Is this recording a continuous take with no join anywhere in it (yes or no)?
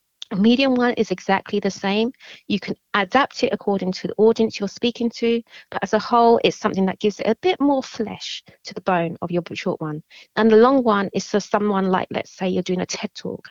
yes